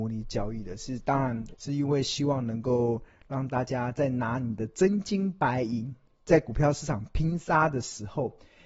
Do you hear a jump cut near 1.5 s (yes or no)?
yes